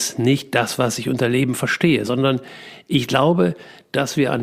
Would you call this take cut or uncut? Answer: uncut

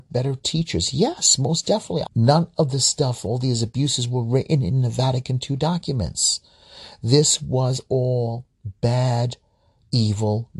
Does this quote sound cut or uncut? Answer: cut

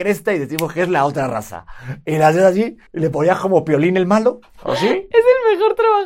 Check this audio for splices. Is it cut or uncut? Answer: cut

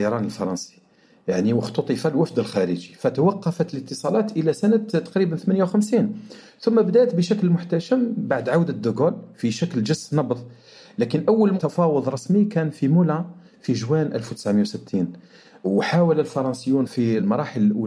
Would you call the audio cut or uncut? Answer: uncut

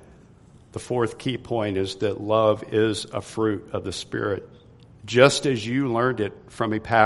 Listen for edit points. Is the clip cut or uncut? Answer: cut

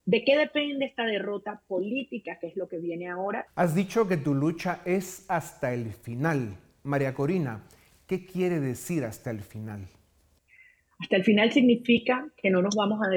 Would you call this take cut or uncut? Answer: cut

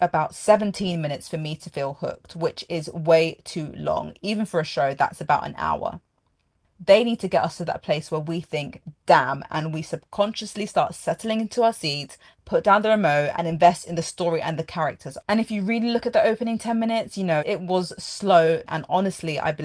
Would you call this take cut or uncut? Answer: cut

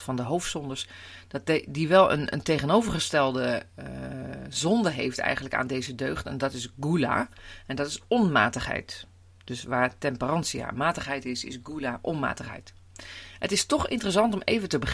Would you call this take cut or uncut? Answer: uncut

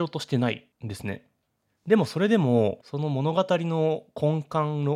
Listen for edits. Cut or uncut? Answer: uncut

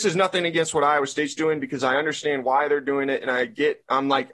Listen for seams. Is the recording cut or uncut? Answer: uncut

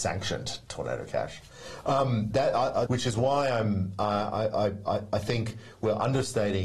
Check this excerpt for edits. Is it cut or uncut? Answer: cut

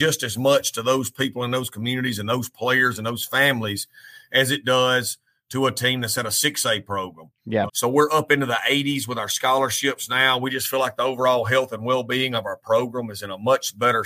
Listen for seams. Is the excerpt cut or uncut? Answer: cut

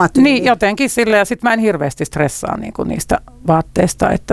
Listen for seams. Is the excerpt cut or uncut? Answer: uncut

